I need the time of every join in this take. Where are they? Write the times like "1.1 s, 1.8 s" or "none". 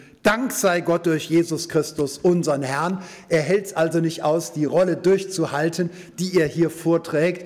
none